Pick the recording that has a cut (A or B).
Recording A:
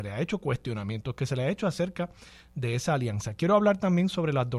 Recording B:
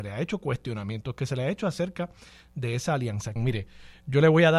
B